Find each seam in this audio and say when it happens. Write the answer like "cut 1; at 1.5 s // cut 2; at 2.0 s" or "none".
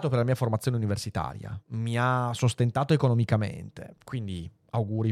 cut 1; at 1.6 s // cut 2; at 4.0 s

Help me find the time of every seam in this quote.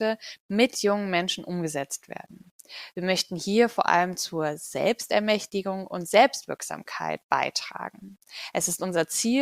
none

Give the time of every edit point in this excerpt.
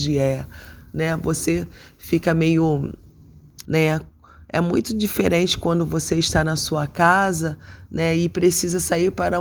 cut 1; at 3.6 s

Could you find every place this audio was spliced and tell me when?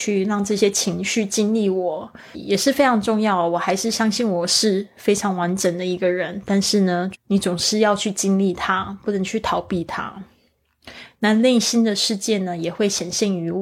cut 1; at 2.3 s // cut 2; at 7.1 s

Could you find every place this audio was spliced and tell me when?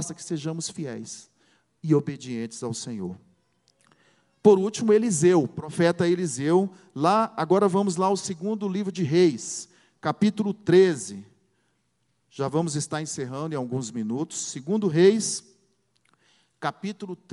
none

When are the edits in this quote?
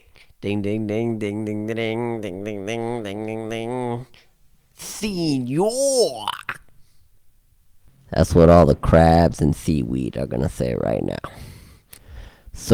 none

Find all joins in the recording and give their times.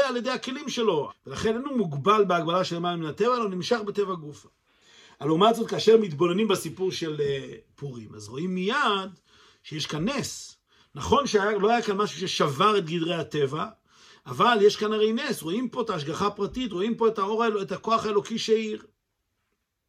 cut 1; at 1.1 s

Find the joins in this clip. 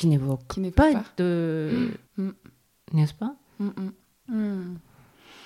cut 1; at 2.0 s // cut 2; at 4.2 s

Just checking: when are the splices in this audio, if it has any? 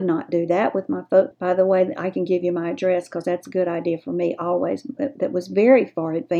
cut 1; at 1.3 s // cut 2; at 5.0 s

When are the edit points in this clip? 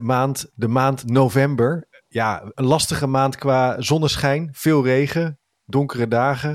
cut 1; at 2.5 s

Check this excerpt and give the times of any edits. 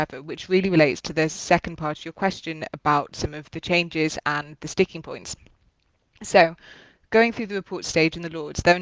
none

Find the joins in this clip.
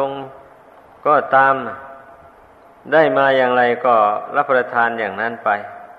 none

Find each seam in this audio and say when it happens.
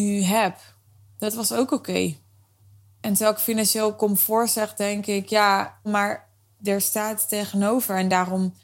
cut 1; at 5.8 s

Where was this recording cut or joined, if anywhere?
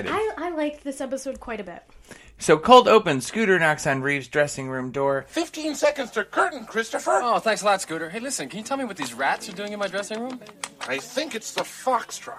none

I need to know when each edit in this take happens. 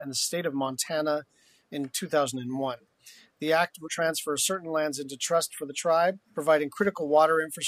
cut 1; at 3.9 s // cut 2; at 6.2 s

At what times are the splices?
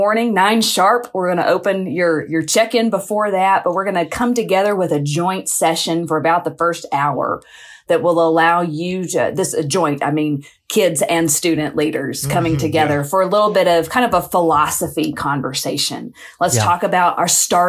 none

